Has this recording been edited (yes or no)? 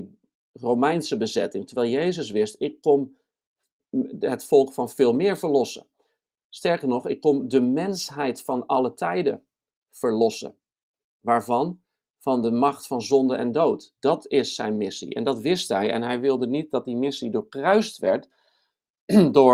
no